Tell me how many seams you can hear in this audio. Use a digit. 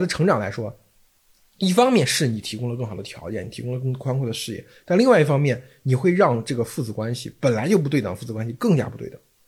0